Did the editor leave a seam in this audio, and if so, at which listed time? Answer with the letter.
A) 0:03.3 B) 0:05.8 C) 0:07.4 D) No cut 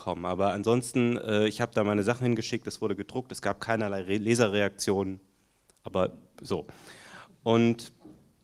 D